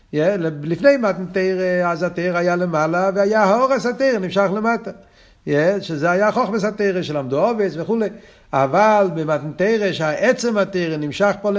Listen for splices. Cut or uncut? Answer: uncut